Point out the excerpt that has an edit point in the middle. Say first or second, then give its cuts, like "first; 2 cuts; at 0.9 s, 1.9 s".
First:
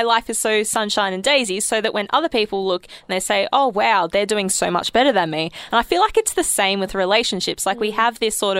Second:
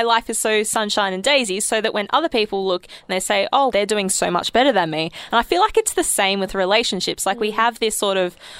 second; 1 cut; at 3.7 s